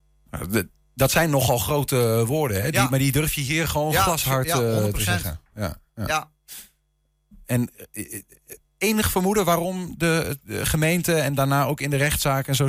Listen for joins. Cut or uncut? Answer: uncut